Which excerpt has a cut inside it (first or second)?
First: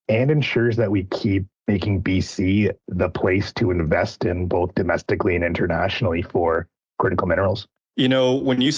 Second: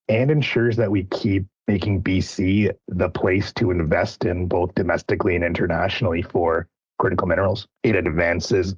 second